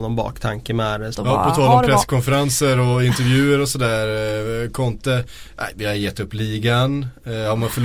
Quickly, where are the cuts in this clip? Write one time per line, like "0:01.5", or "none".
0:01.1